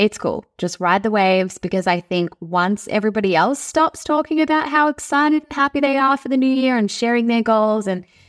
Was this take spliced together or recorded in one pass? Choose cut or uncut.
uncut